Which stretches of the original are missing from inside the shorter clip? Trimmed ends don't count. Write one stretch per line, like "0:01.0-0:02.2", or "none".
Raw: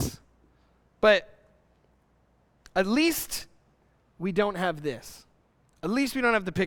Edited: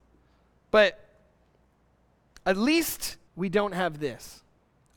0:03.6-0:04.1